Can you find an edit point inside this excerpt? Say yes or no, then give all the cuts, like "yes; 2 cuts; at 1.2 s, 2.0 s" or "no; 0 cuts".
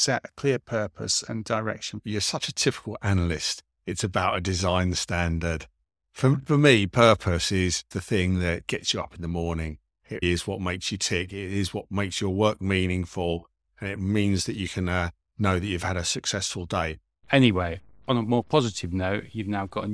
yes; 2 cuts; at 10.2 s, 17.2 s